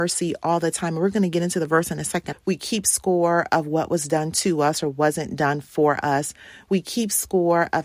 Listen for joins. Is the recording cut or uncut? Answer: cut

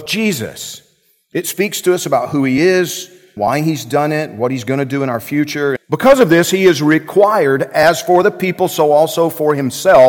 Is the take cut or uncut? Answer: cut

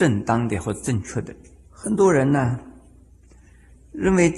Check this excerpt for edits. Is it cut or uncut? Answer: cut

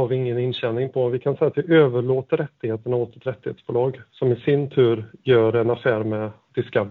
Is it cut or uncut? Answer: uncut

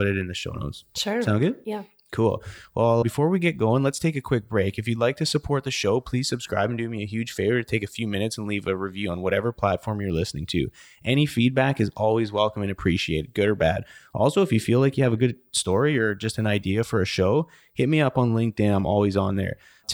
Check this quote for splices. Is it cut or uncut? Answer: uncut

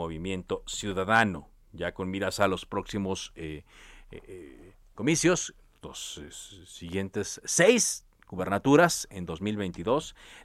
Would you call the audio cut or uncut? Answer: uncut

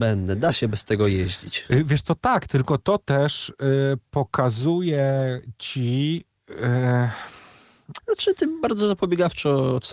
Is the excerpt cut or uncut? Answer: cut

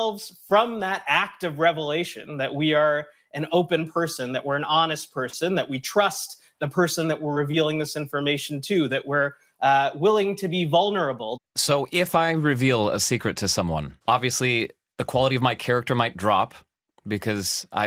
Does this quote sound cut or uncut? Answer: cut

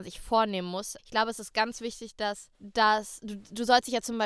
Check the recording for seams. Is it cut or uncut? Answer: cut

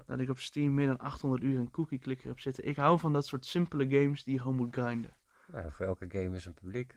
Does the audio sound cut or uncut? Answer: cut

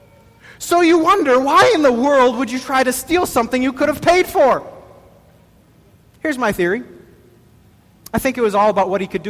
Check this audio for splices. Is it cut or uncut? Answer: uncut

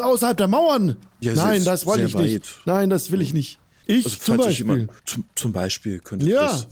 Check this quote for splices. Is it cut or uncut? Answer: cut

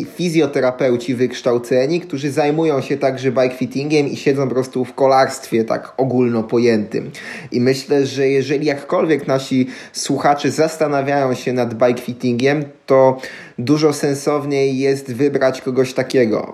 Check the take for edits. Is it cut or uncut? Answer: uncut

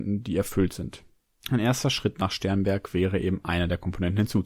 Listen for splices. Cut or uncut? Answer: cut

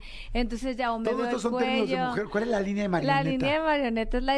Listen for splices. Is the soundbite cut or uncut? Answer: uncut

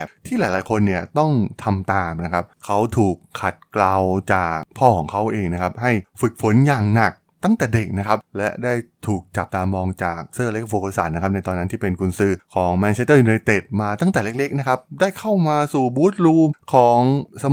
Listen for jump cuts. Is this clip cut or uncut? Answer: cut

